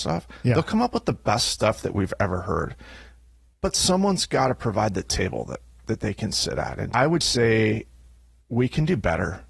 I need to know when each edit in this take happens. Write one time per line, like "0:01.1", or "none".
0:07.2